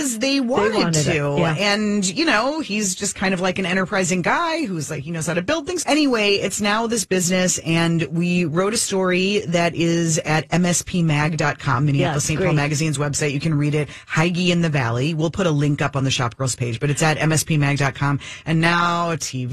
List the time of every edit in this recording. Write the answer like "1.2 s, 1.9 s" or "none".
5.8 s